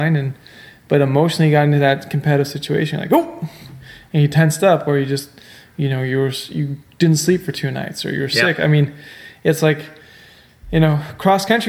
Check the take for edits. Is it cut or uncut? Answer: uncut